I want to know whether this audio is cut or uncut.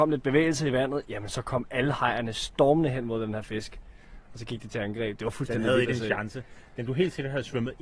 uncut